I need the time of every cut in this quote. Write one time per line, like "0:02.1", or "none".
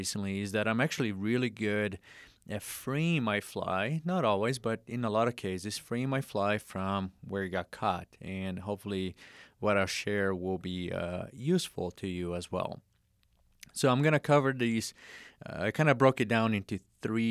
none

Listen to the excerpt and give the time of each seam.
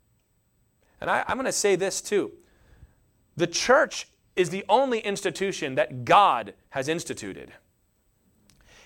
none

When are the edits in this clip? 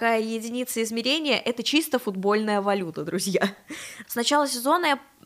0:04.0

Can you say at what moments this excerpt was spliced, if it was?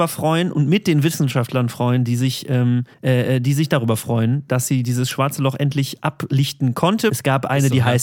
0:02.9
0:07.1

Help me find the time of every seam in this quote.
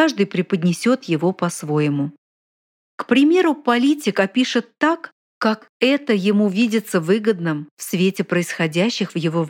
none

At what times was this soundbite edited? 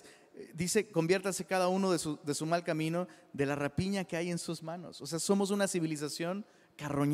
none

